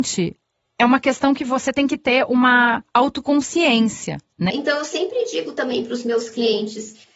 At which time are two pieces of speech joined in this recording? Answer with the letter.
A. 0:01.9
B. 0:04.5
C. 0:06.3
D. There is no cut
B